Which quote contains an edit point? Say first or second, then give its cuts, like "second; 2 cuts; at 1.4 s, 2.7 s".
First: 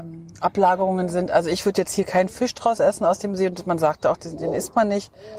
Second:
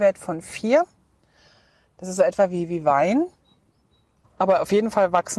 second; 1 cut; at 4.2 s